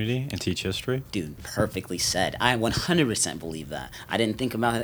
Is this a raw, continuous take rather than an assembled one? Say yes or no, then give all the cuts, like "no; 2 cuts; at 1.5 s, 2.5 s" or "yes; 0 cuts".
yes; 0 cuts